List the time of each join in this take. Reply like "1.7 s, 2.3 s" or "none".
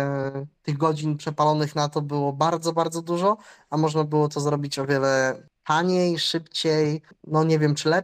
none